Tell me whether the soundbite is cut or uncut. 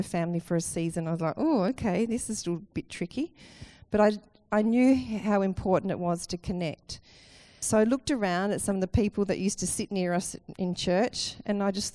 cut